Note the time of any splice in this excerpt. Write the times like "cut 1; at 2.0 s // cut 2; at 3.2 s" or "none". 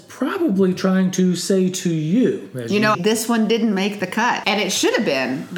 cut 1; at 2.9 s // cut 2; at 4.4 s

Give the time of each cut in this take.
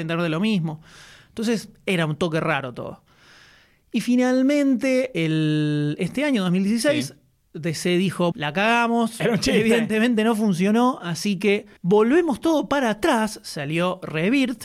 cut 1; at 8.3 s // cut 2; at 11.8 s

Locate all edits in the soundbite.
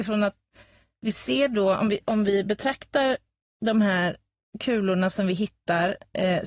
none

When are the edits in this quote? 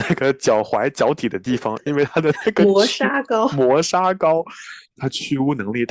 none

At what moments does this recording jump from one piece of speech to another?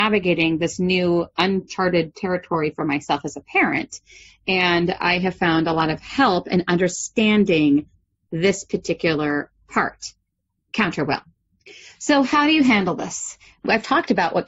none

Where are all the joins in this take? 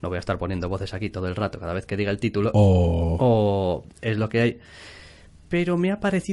none

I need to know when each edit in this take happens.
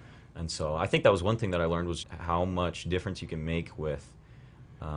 cut 1; at 2.0 s

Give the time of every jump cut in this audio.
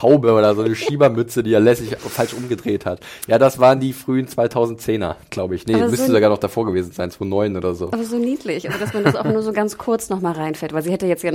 none

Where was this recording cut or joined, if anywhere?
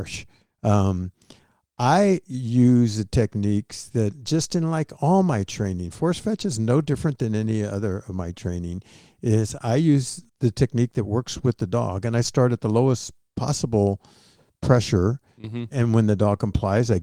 cut 1; at 10.3 s

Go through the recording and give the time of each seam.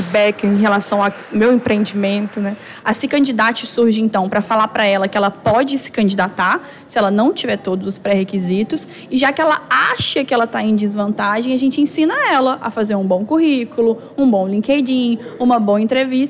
cut 1; at 2.8 s

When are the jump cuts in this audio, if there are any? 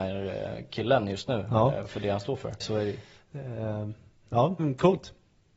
cut 1; at 2.6 s // cut 2; at 4.6 s

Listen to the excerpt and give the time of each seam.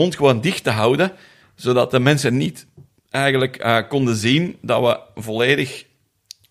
none

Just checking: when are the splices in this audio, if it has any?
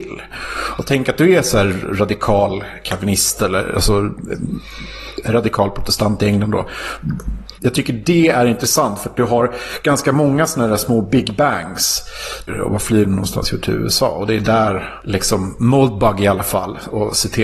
cut 1; at 7.6 s // cut 2; at 12.5 s

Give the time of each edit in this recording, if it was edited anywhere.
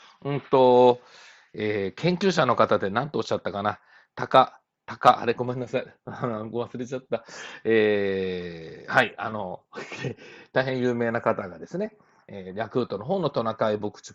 none

